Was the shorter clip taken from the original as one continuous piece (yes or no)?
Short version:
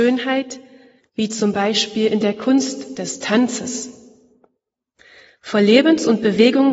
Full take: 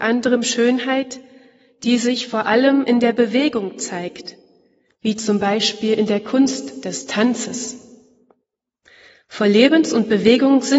no